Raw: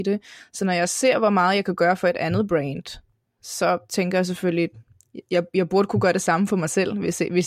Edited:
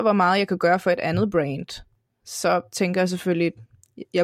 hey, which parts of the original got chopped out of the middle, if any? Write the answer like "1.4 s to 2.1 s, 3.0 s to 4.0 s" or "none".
none